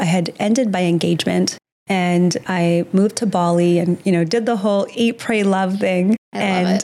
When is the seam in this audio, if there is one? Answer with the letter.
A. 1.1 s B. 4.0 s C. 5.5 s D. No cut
D